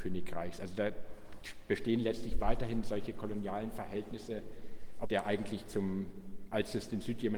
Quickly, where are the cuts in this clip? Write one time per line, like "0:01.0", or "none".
0:05.0